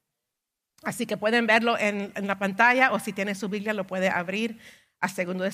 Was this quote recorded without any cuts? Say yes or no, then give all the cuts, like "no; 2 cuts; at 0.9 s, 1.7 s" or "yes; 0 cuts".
yes; 0 cuts